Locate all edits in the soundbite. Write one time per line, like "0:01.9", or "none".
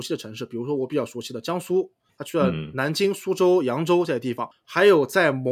0:04.5

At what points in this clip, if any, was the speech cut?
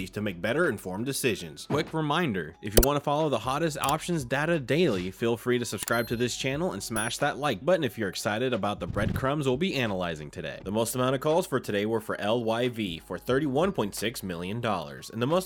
0:01.7
0:10.6

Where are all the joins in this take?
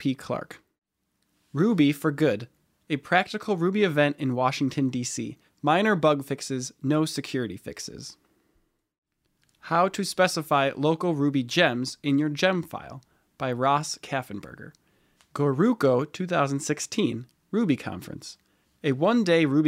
0:05.5
0:15.2

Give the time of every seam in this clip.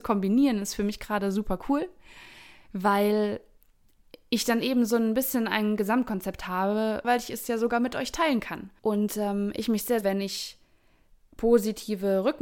0:07.0
0:10.0

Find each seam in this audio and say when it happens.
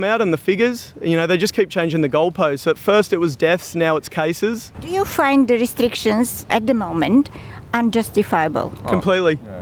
none

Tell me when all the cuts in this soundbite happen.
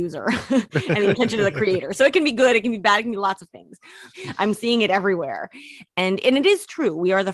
0:04.1
0:05.9

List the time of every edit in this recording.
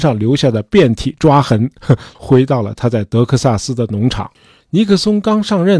0:02.1
0:04.6

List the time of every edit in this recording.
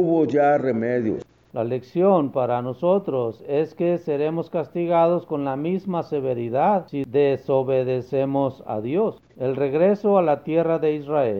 0:01.5
0:09.3

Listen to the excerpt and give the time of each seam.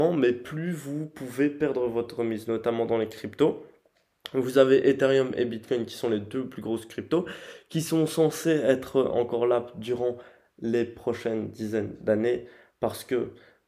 none

